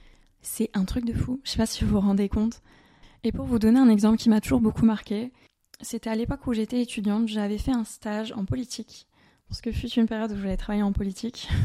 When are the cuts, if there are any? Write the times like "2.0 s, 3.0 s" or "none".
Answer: none